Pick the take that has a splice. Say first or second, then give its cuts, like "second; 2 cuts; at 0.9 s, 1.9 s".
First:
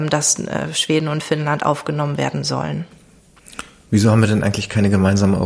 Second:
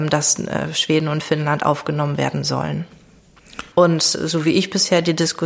second; 1 cut; at 3.7 s